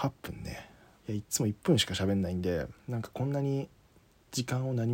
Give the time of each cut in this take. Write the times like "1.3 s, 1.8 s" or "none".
1.0 s, 2.8 s